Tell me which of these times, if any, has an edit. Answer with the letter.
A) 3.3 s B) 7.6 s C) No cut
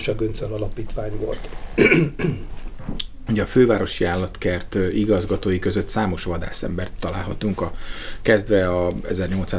A